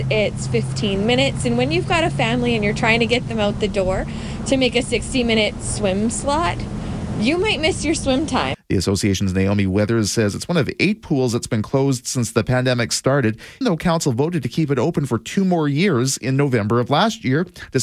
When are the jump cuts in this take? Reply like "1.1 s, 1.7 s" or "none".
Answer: 8.5 s, 13.6 s